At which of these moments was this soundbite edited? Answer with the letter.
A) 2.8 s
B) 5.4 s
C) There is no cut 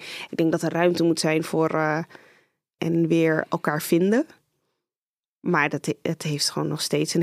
A